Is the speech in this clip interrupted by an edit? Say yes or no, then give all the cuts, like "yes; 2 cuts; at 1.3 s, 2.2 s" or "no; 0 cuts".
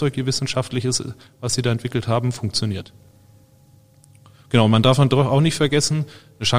no; 0 cuts